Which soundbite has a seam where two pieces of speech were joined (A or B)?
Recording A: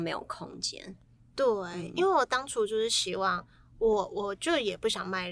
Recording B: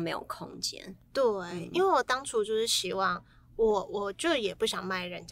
B